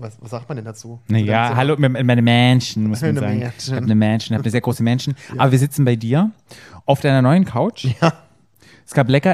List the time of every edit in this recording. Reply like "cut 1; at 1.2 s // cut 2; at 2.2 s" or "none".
none